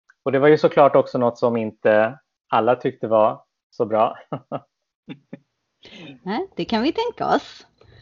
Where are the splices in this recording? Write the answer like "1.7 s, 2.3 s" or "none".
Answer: none

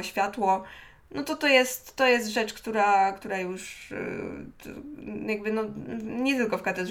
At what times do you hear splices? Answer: none

